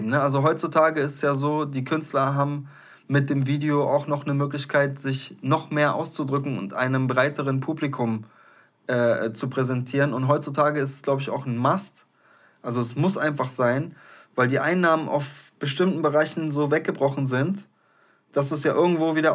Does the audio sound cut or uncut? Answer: uncut